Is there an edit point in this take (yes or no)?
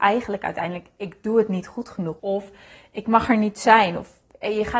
yes